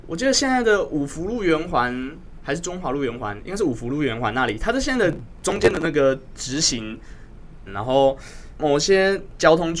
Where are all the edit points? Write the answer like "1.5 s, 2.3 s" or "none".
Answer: 7.7 s